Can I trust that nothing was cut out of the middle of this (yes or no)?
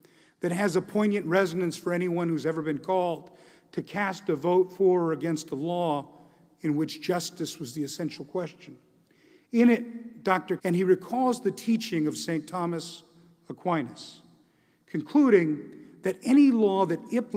no